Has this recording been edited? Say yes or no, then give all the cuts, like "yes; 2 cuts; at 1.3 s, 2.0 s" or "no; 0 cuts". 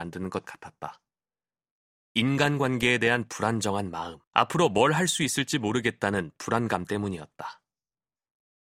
yes; 2 cuts; at 2.0 s, 4.2 s